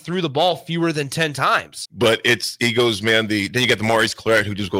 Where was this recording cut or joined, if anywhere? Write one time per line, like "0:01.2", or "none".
0:01.8

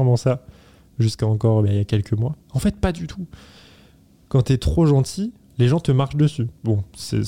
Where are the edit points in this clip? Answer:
0:02.4

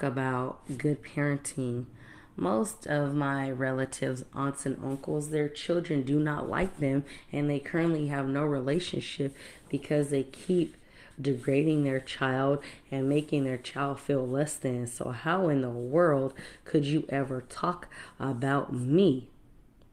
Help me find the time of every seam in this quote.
none

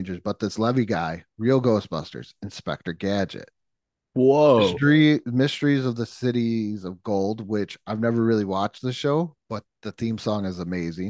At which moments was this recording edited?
none

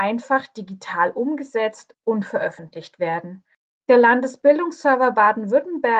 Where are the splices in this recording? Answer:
0:03.8

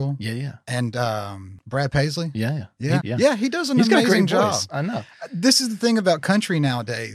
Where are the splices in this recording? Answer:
0:03.0

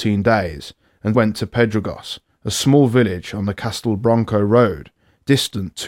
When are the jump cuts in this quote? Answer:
0:01.1

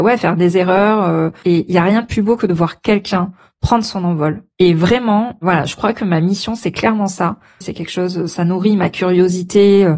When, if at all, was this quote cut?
0:01.4
0:04.5
0:07.6

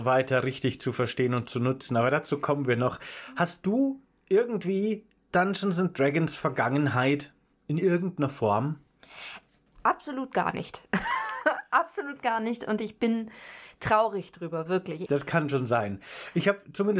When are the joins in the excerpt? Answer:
0:15.1

